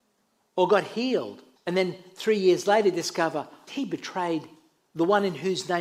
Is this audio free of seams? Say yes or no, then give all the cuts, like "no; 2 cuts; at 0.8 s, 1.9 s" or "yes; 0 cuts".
no; 2 cuts; at 1.6 s, 3.7 s